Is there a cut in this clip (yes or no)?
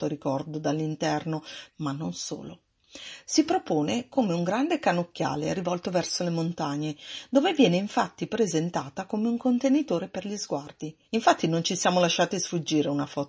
yes